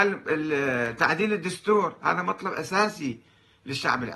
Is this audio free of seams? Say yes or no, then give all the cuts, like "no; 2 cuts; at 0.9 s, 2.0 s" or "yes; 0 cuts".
yes; 0 cuts